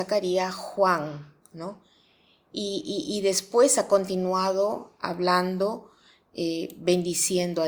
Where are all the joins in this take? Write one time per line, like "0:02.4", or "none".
none